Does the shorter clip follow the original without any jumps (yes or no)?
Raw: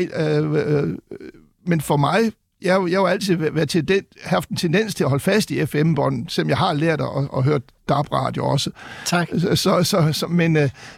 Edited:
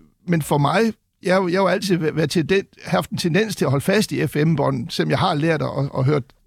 yes